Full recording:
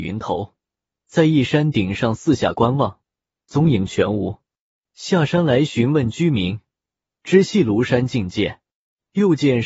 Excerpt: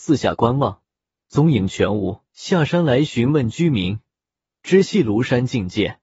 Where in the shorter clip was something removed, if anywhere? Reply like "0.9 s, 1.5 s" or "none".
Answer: 2.3 s

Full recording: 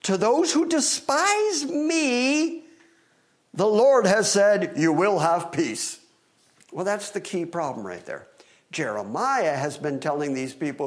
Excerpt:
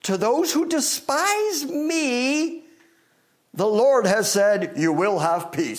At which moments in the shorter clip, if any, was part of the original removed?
none

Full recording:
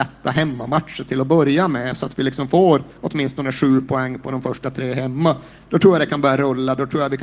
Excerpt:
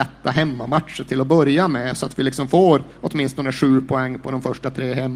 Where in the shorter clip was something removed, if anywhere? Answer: none

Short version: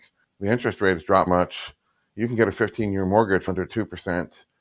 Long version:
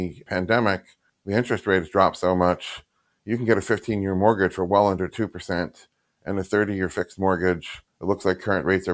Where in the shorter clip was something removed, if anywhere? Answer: 1.3 s, 3.5 s

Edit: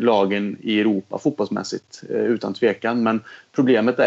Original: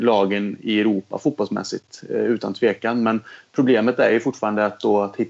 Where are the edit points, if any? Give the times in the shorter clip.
none

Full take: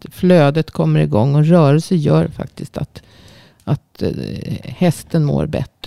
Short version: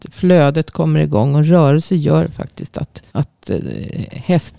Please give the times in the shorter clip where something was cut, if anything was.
3.1 s

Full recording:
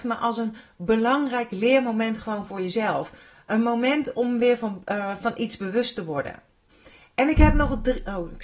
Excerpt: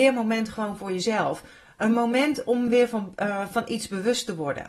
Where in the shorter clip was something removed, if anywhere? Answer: none

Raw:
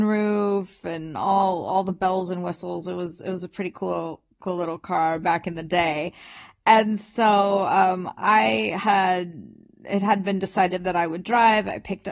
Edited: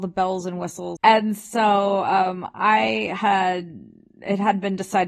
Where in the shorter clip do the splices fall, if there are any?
1.0 s

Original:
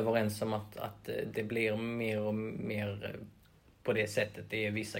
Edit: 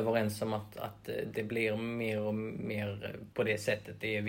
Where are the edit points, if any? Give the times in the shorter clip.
3.3 s

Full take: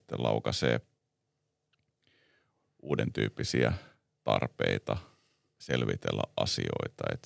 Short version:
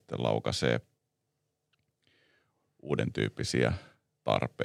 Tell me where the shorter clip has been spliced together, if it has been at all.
none

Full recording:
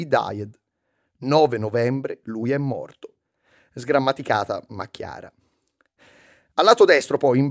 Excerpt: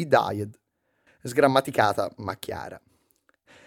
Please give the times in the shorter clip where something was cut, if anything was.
1.1 s

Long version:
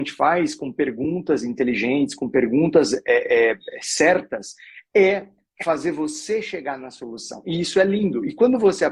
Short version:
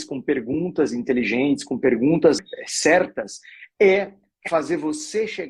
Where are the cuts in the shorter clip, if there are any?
2.4 s

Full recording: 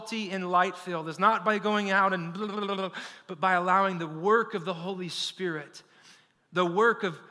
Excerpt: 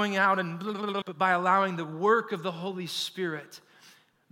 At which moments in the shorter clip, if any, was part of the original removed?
1.0 s

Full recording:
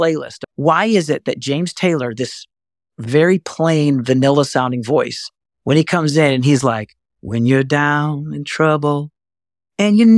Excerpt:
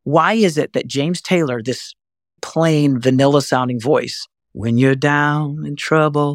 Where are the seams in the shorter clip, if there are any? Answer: 2.4 s, 4.4 s

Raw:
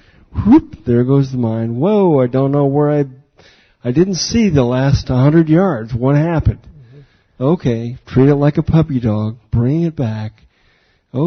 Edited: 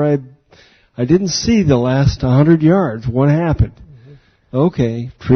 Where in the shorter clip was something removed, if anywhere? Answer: none

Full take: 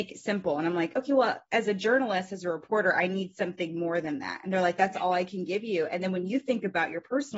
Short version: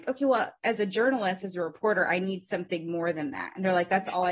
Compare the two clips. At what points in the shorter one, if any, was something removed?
none

